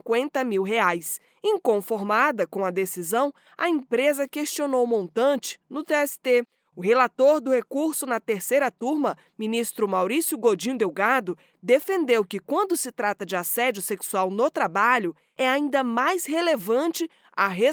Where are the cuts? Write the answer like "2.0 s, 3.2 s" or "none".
none